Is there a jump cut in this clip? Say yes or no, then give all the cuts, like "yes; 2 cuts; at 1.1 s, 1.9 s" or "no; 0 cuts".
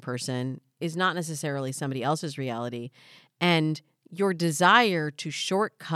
no; 0 cuts